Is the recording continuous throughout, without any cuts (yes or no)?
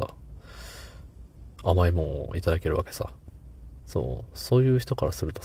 no